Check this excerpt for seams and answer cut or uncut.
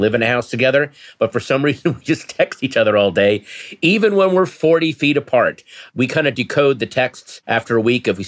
uncut